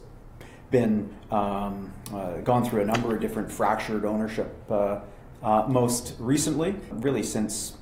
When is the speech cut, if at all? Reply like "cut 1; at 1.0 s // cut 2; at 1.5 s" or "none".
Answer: cut 1; at 5.3 s // cut 2; at 6.9 s